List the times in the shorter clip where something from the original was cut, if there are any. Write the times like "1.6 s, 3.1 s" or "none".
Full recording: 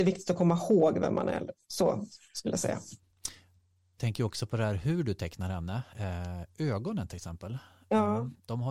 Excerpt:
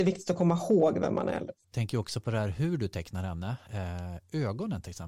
1.6 s

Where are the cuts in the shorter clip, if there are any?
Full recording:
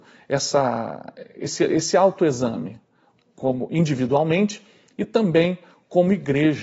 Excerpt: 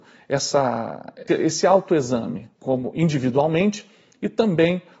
1.3 s, 2.5 s

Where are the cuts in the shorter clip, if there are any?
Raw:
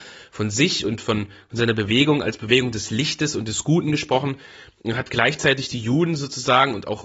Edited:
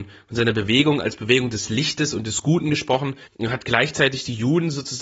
3.3 s

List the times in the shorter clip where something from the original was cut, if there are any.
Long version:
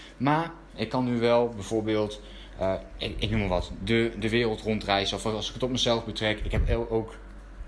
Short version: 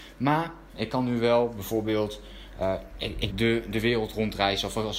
3.3 s

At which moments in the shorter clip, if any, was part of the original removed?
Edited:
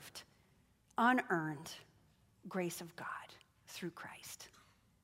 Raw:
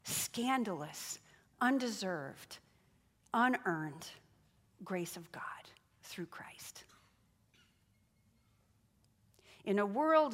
none

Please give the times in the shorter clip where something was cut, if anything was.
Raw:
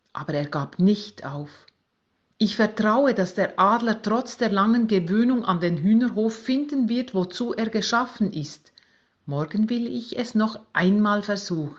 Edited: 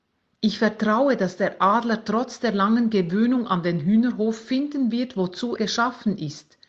5.6 s

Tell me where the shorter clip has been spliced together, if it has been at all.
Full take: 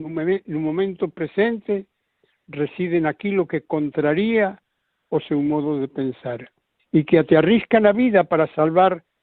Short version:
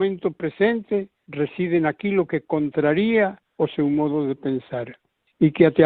1.2 s, 3.5 s

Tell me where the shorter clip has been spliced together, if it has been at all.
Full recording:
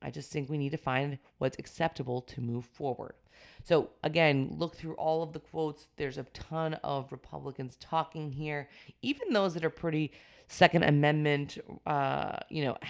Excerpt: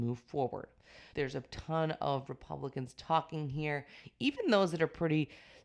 1.1 s

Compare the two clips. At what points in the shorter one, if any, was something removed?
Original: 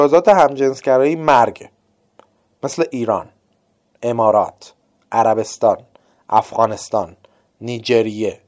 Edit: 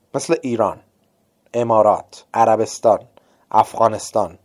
2.3 s

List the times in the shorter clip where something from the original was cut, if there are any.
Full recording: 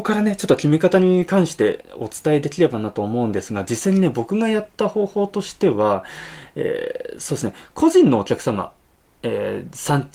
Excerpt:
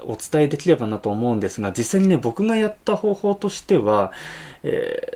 none

